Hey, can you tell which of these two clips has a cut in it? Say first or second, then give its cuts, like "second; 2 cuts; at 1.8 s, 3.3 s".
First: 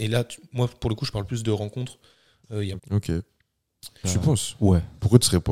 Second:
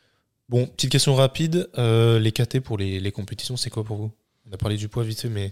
first; 2 cuts; at 2.8 s, 4.0 s